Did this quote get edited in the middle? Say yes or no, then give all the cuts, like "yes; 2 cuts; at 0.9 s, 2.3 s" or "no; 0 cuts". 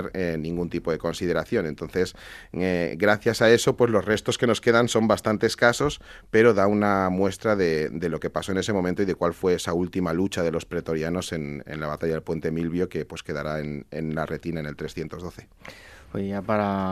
no; 0 cuts